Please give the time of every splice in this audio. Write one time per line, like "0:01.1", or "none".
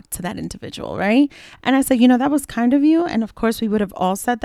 none